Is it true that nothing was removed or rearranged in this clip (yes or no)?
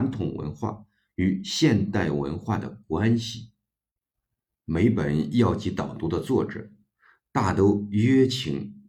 yes